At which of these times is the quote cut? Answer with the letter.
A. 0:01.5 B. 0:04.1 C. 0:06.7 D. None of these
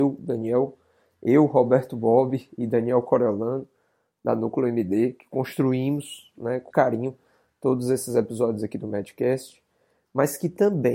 C